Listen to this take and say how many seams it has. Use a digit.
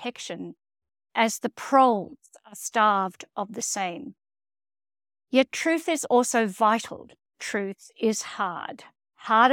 1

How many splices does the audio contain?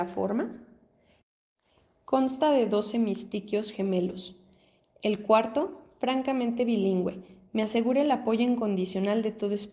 0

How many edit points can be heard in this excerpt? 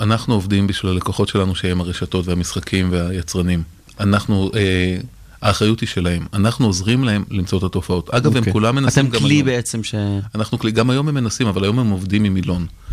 0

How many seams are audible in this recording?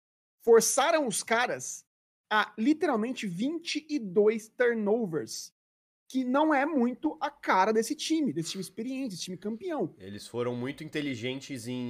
0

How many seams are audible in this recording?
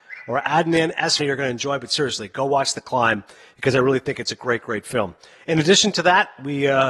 1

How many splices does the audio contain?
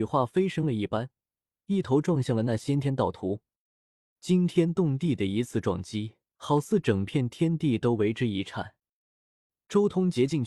2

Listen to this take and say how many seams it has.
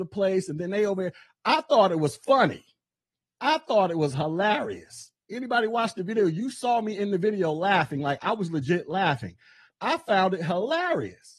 1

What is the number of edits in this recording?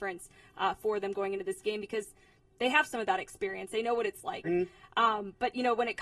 1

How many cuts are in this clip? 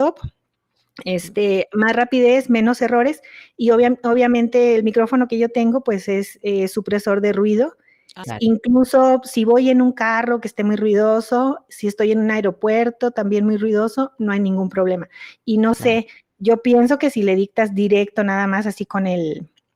1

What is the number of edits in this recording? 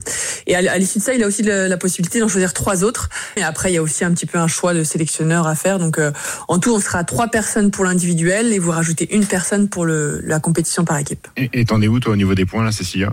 1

